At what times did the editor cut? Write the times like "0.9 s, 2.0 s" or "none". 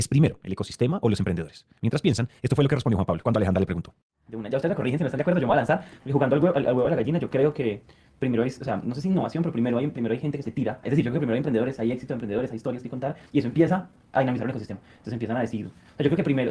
none

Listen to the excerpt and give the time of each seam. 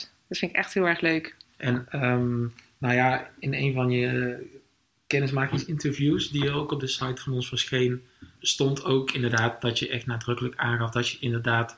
1.5 s, 8.4 s

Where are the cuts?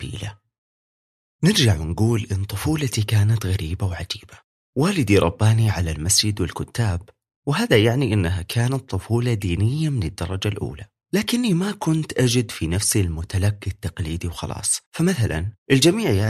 14.9 s

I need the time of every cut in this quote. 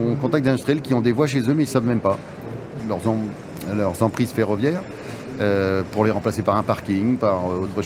2.8 s

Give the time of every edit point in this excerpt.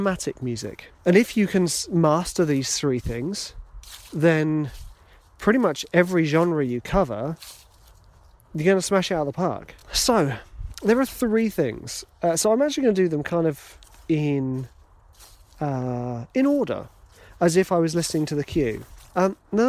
none

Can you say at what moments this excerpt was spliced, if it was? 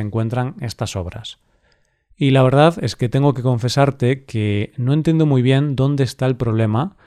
none

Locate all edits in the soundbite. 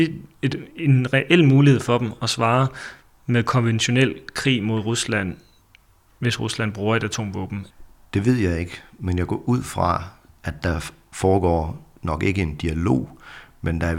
none

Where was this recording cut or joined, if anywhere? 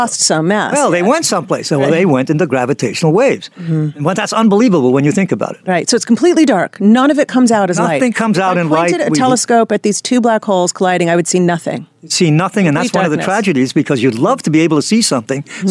none

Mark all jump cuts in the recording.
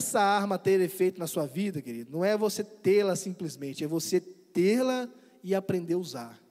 none

